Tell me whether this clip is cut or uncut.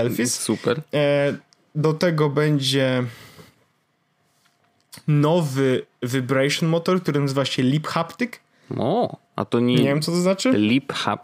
cut